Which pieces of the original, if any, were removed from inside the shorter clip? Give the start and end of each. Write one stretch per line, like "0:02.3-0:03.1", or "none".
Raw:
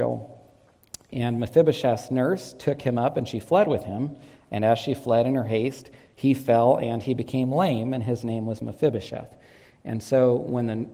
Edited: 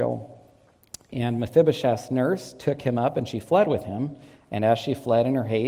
none